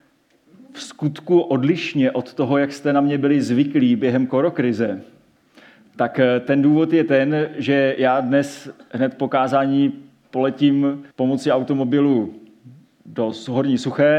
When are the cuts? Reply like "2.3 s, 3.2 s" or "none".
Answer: 11.1 s